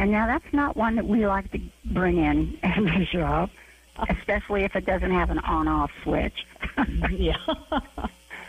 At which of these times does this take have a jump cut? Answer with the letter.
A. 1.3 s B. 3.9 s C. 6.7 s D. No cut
B